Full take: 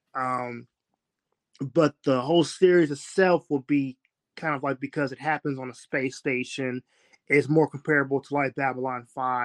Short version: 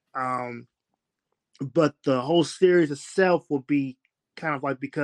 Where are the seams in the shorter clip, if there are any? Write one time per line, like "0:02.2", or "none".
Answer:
none